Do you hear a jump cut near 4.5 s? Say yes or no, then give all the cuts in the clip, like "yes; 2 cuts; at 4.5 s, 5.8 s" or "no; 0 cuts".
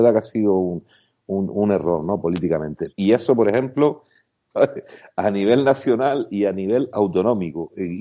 yes; 2 cuts; at 2.9 s, 4.5 s